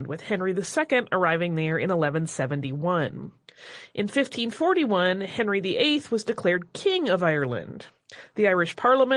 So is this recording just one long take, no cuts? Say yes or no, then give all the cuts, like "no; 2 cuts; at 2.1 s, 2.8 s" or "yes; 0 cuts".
yes; 0 cuts